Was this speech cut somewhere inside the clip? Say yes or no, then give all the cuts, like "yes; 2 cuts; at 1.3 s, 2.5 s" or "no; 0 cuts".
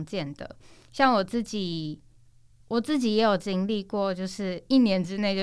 no; 0 cuts